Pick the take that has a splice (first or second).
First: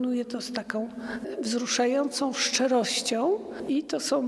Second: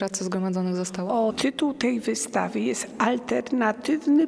second